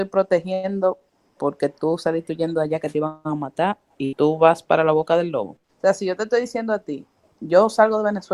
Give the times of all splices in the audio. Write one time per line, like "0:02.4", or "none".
0:05.6